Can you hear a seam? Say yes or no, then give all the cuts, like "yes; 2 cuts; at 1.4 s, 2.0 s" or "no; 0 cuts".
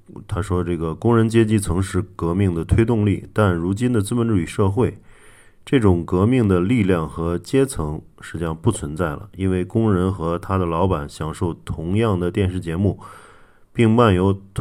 no; 0 cuts